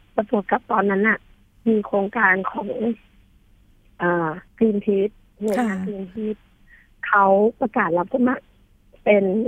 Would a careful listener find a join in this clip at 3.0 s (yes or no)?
no